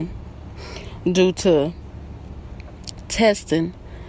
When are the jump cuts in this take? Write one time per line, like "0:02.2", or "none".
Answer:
none